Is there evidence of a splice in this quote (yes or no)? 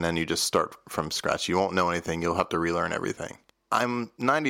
no